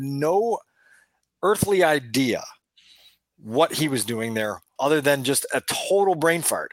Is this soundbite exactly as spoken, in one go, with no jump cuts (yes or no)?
no